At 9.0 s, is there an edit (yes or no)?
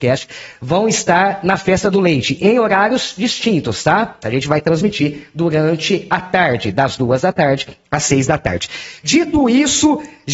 no